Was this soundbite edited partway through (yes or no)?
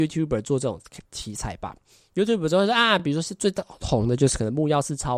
no